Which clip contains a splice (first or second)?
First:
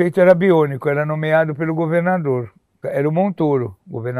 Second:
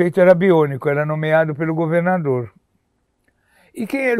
first